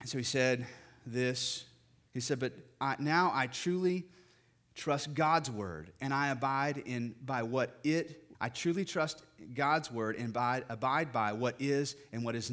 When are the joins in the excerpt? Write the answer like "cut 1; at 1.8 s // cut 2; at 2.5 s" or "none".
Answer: cut 1; at 2.1 s // cut 2; at 8.3 s